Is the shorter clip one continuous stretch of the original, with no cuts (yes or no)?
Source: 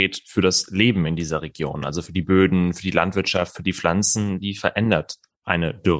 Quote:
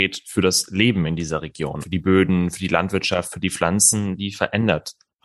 no